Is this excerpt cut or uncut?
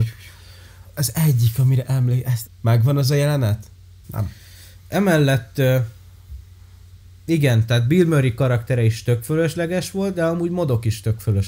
cut